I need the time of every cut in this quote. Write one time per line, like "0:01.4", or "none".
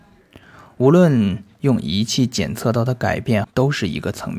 0:03.4